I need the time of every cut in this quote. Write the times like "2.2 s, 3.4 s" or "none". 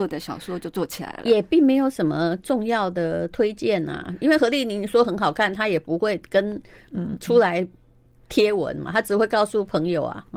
none